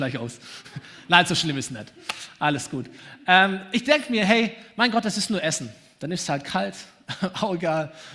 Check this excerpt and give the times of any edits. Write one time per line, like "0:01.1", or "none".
none